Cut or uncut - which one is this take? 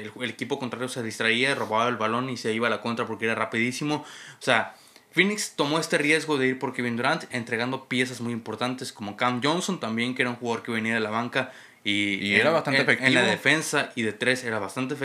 uncut